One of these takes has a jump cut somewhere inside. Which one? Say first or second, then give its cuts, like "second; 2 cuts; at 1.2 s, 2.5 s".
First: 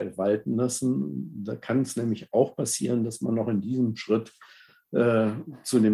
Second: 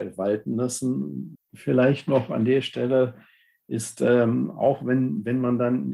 second; 1 cut; at 1.4 s